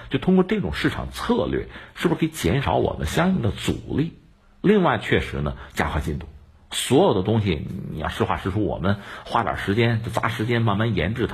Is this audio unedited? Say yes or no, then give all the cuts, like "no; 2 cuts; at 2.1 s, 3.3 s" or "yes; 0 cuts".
yes; 0 cuts